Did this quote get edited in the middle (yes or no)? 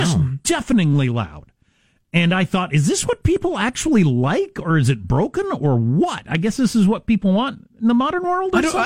no